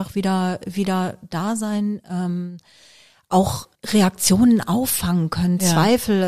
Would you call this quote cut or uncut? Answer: cut